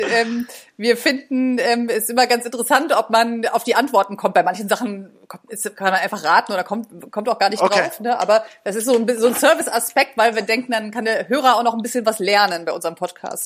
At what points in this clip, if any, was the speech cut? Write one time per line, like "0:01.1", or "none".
none